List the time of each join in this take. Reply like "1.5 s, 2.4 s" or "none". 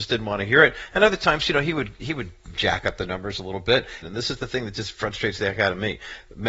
4.0 s